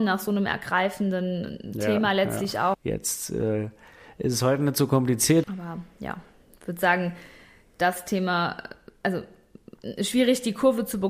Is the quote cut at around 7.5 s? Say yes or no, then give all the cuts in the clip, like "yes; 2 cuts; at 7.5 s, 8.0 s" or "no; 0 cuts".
no; 2 cuts; at 2.7 s, 5.4 s